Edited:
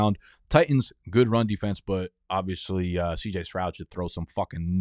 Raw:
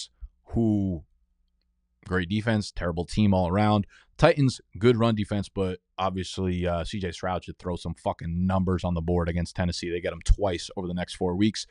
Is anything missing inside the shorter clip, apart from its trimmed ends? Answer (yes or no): no